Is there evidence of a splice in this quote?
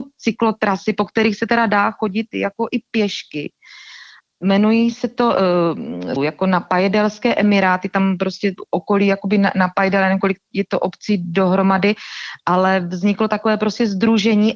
yes; 1 cut; at 6.2 s

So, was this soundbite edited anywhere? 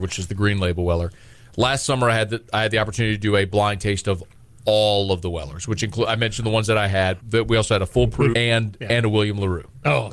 yes; 2 cuts; at 7.2 s, 8.3 s

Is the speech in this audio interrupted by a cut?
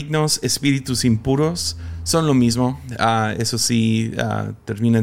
no; 0 cuts

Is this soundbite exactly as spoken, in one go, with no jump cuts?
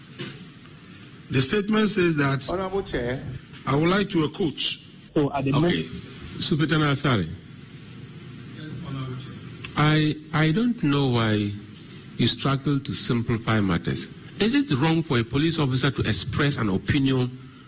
no; 1 cut; at 5.1 s

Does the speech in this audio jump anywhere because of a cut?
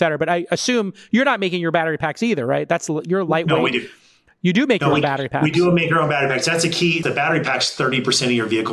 yes; 1 cut; at 7.0 s

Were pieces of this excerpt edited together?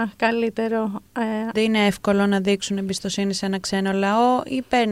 yes; 1 cut; at 1.5 s

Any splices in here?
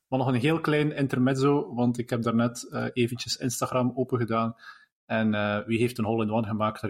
no; 0 cuts

